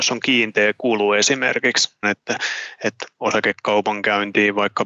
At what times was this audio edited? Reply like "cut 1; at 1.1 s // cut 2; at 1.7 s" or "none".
cut 1; at 2.0 s